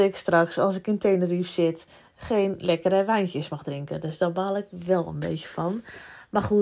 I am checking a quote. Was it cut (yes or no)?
no